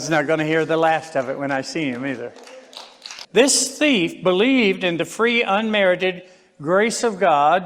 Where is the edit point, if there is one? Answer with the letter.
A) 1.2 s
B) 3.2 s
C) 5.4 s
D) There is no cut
B